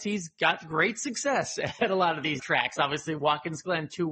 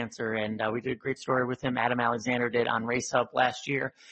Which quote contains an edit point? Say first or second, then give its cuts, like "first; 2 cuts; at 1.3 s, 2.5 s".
first; 1 cut; at 2.4 s